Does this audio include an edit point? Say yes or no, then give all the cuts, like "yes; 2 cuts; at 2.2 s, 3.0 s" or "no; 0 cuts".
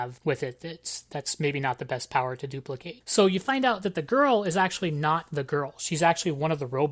no; 0 cuts